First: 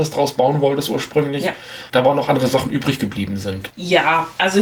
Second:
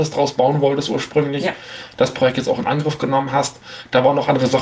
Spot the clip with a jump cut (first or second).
first